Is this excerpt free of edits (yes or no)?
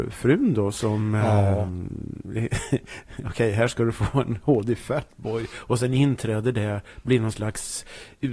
yes